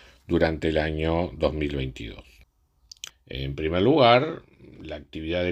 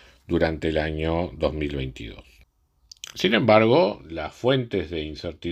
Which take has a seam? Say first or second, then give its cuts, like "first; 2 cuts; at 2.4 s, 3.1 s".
first; 1 cut; at 3.1 s